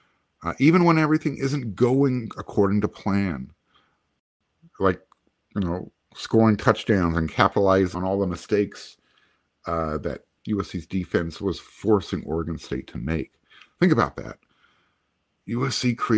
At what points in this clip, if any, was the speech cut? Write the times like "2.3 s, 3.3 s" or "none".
none

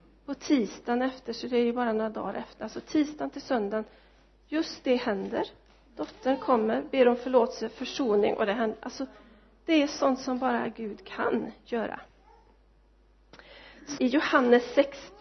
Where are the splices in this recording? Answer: 14.0 s

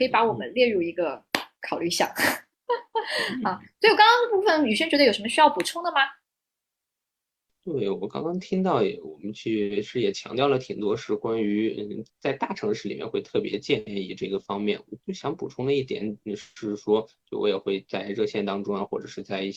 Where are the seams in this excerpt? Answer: 7.5 s

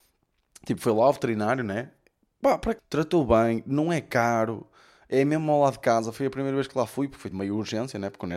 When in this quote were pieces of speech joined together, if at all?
2.8 s, 7.3 s

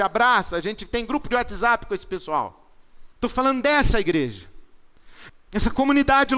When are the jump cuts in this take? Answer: 3.1 s, 5.3 s

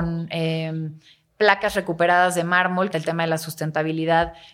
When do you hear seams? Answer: 2.9 s

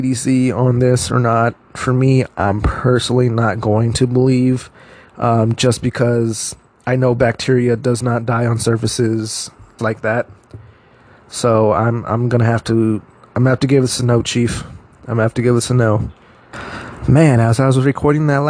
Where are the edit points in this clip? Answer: 9.8 s

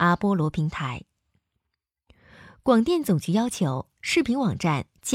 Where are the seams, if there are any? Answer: none

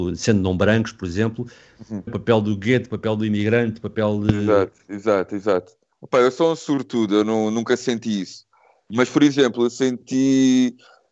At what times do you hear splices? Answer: 2.1 s

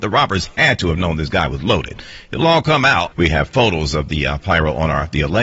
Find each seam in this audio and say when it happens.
3.1 s

